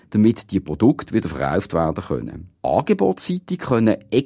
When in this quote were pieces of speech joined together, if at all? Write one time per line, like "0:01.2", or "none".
0:02.5